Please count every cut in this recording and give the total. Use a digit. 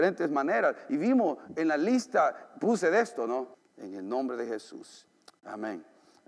1